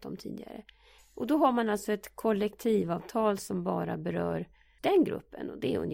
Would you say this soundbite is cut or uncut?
cut